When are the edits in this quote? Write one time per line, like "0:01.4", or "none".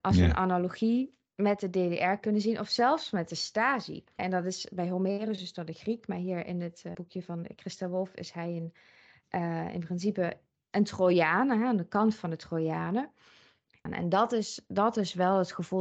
0:04.2
0:06.9
0:13.9